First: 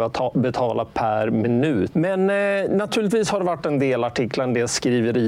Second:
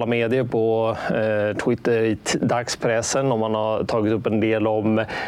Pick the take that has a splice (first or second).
first